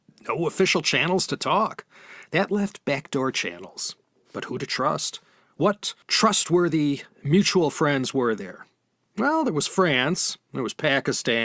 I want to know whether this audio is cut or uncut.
cut